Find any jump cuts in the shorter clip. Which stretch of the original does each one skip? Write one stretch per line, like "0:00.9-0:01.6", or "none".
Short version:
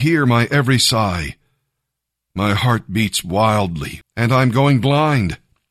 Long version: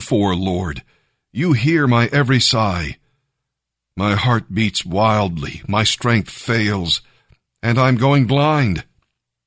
0:05.6-0:07.5